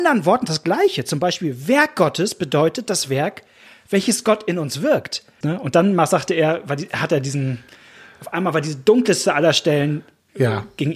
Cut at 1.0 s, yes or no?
no